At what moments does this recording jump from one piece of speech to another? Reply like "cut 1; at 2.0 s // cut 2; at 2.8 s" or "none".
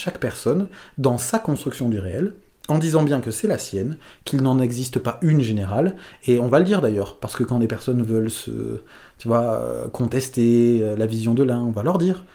none